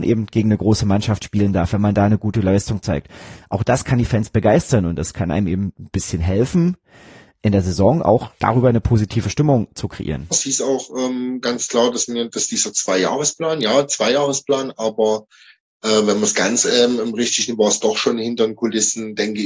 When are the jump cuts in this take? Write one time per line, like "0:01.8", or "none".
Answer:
0:10.3